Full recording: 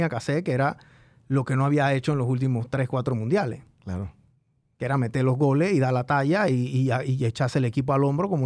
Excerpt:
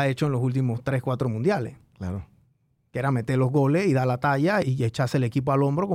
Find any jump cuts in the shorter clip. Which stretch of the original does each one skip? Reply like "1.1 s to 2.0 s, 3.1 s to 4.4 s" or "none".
6.5 s to 7.0 s